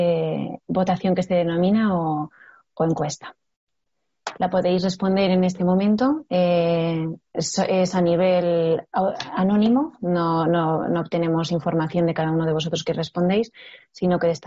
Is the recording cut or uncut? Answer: uncut